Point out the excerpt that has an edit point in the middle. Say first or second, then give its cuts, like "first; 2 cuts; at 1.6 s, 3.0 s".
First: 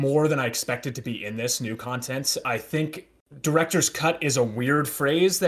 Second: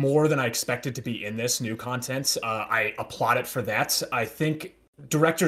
first; 1 cut; at 2.4 s